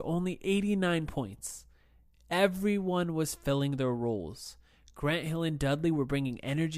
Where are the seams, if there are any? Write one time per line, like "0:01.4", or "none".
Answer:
none